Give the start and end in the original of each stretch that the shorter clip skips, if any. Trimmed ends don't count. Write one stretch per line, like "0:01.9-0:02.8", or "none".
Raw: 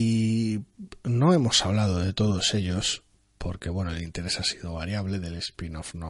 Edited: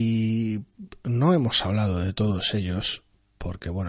none